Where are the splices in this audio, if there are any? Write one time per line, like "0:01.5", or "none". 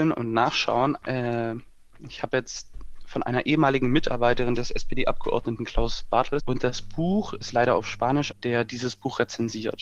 0:01.0
0:06.4
0:08.3